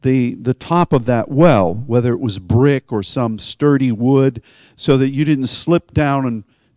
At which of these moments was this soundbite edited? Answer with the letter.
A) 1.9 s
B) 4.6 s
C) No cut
C